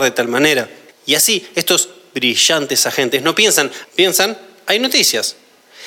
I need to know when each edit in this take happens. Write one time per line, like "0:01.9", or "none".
0:00.9
0:03.8